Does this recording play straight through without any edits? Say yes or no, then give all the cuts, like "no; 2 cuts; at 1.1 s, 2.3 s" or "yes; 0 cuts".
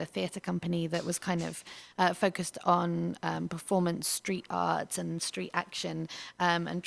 yes; 0 cuts